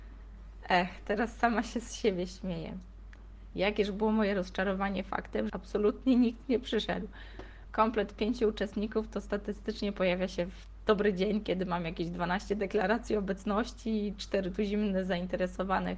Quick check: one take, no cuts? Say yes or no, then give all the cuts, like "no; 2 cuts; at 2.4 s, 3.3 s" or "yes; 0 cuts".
no; 3 cuts; at 3.5 s, 5.5 s, 7.6 s